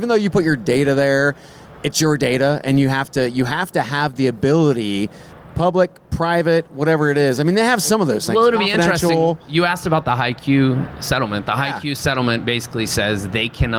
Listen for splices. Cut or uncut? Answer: uncut